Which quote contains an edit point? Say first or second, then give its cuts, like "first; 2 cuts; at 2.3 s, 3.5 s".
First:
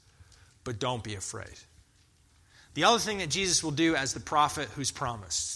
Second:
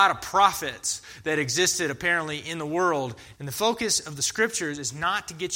second; 1 cut; at 3.3 s